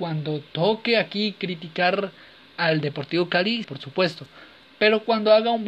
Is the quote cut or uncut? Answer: cut